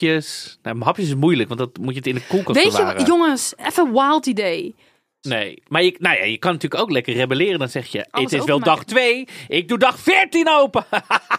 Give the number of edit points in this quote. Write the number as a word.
two